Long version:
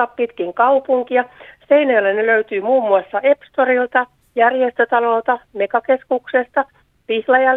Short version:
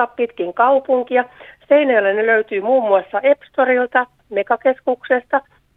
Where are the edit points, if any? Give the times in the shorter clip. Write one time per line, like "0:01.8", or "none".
0:04.2